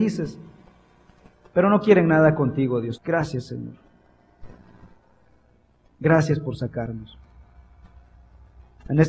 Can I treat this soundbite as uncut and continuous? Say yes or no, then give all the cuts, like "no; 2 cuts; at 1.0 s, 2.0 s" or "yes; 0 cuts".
no; 1 cut; at 3.0 s